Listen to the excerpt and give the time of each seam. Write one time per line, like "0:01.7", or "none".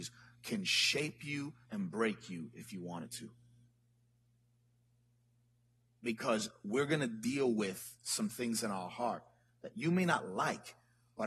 0:01.6